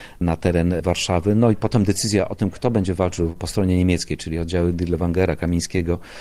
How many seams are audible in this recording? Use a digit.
0